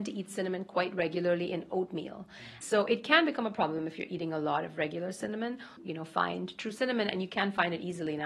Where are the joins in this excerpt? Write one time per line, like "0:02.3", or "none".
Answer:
0:02.6
0:05.8